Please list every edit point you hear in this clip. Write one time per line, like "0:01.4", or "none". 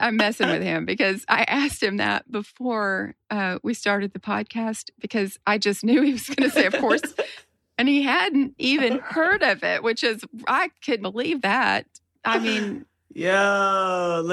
0:03.2
0:11.0